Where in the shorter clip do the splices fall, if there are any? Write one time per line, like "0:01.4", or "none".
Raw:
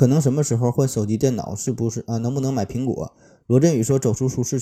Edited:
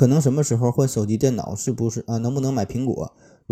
none